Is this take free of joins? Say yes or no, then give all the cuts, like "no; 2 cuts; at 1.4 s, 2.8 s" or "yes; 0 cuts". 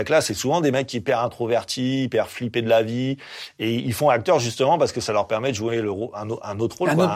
yes; 0 cuts